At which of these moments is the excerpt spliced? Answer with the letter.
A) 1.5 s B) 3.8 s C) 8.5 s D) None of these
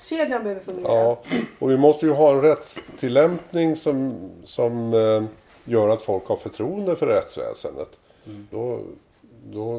C